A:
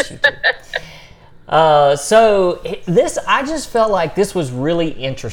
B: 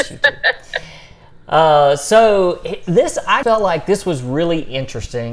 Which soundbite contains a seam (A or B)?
B